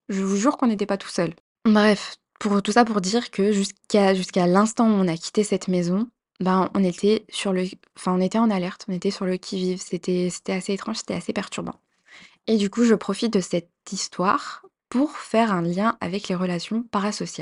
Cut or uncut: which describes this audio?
uncut